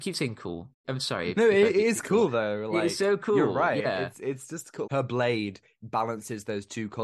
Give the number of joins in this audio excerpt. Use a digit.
1